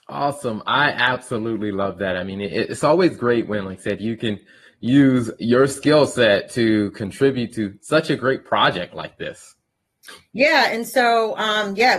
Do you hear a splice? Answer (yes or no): no